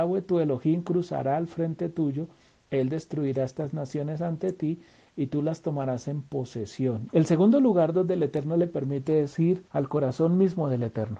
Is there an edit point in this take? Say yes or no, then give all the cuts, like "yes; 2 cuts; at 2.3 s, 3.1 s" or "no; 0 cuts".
yes; 2 cuts; at 7.1 s, 9.7 s